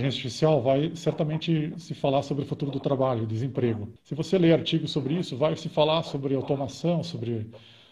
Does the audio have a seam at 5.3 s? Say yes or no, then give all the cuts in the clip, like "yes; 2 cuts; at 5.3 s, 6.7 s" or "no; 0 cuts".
no; 1 cut; at 4.0 s